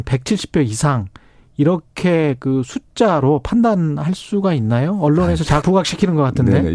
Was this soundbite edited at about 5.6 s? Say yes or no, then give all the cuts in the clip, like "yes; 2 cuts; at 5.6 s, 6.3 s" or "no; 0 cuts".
yes; 1 cut; at 5.6 s